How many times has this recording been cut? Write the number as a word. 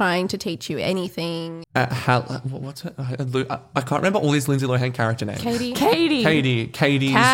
one